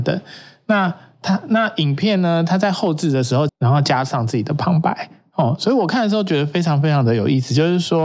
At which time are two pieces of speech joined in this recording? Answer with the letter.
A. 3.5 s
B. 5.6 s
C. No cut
A